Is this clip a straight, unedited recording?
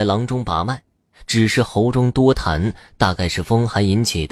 yes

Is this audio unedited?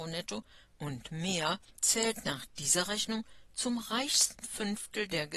yes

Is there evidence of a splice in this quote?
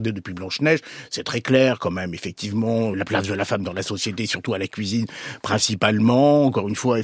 yes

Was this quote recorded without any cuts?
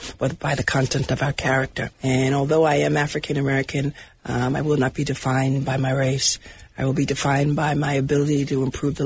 no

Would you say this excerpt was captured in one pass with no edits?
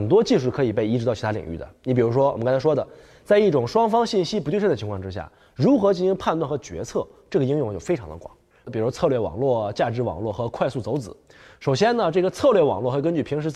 no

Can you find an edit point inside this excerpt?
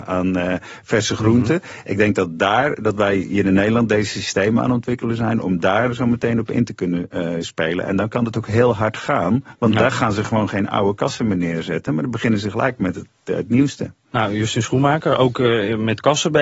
no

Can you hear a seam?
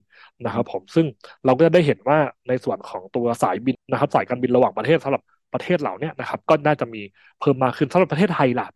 yes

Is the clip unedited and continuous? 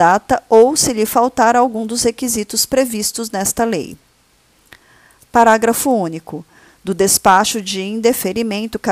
yes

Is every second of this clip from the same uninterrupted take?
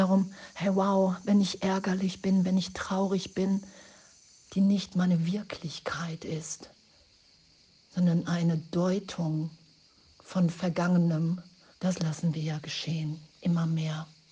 no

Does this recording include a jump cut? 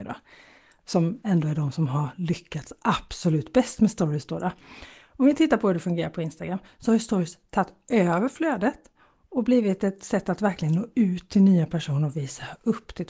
no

